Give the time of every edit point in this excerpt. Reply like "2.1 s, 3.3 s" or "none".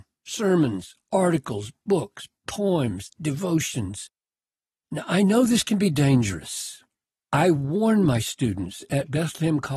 7.1 s